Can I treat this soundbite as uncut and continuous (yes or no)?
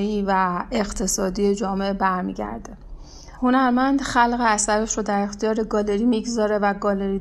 no